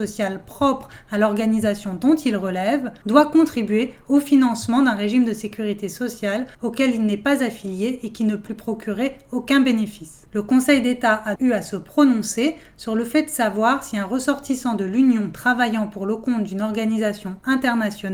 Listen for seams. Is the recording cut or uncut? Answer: cut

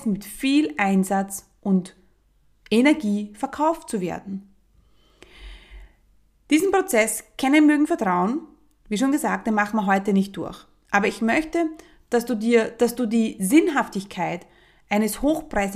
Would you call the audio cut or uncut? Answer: uncut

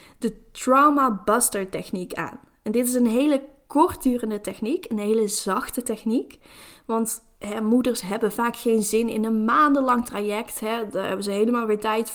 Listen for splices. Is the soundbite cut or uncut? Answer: uncut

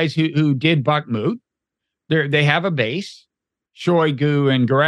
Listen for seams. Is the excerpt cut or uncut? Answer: cut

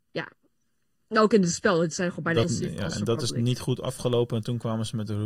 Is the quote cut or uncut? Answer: cut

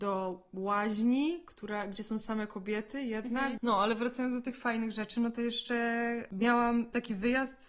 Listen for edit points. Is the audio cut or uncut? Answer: cut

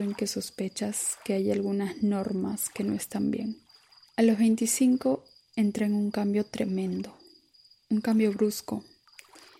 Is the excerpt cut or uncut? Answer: cut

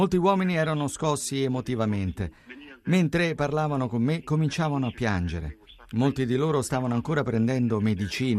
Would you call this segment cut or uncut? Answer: uncut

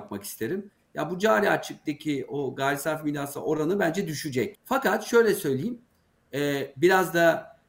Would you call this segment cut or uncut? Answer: cut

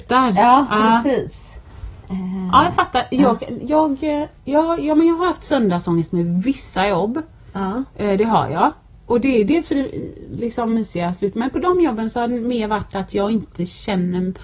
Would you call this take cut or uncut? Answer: cut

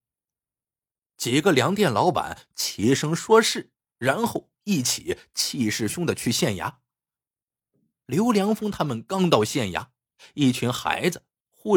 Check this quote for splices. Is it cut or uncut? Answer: cut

